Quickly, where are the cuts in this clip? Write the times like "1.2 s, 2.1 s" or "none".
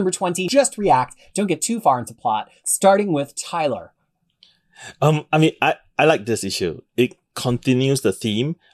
none